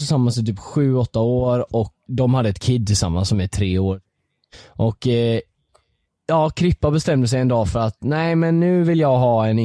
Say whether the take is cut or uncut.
cut